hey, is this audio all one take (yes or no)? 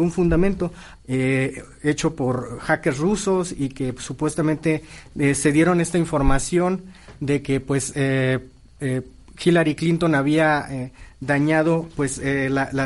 no